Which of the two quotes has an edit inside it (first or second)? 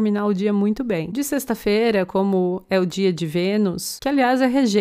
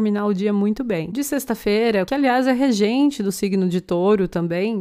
second